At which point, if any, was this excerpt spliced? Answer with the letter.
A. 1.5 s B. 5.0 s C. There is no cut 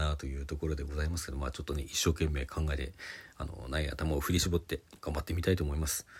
B